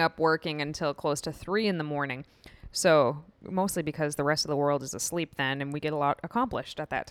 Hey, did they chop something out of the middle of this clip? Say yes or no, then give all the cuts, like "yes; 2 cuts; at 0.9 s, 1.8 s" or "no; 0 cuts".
no; 0 cuts